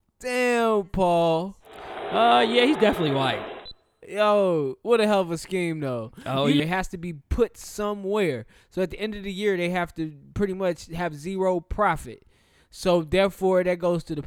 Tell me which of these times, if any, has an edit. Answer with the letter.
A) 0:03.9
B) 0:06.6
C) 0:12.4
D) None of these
B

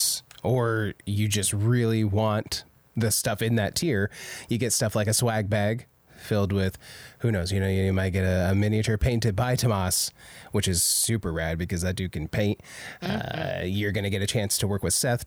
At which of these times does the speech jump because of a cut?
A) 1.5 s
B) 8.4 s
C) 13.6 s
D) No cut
D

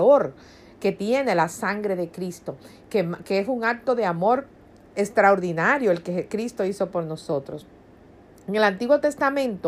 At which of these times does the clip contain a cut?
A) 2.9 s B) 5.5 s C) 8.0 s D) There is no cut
D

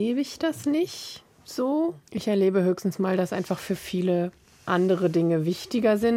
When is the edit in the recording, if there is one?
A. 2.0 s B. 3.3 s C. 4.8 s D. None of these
A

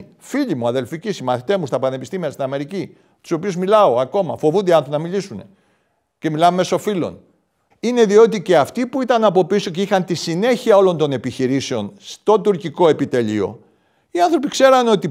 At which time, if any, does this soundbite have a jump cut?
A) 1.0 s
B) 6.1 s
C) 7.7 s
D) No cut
C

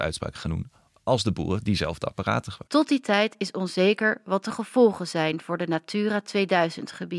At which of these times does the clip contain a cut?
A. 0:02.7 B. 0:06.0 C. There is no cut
A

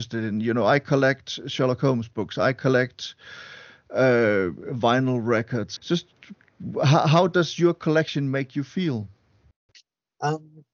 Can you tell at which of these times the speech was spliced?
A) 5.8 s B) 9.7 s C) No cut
A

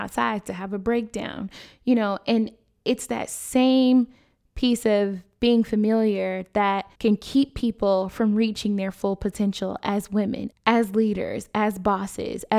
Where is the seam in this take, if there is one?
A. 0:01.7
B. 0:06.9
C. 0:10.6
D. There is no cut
B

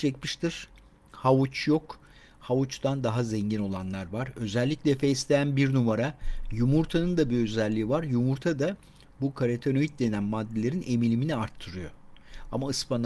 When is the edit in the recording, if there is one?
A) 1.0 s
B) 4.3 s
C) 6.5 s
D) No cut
D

